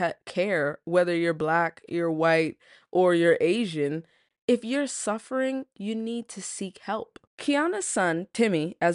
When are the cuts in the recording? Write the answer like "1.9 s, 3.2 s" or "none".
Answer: 7.3 s